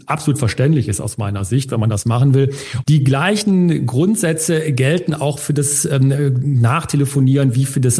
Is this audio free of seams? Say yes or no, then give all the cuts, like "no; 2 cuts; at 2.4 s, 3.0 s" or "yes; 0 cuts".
no; 1 cut; at 2.8 s